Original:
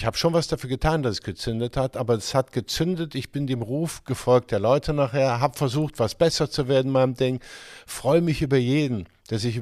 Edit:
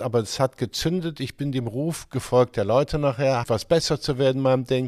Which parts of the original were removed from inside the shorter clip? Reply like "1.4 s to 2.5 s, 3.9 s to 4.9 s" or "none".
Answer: 5.4 s to 5.9 s